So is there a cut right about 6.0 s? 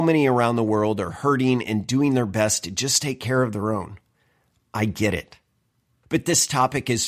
yes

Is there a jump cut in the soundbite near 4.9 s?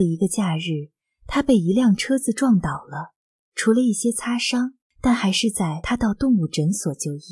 yes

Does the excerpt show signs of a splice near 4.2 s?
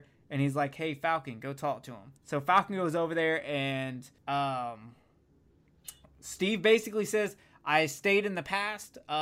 yes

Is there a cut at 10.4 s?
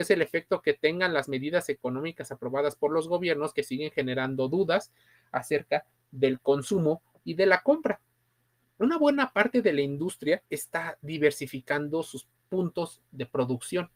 yes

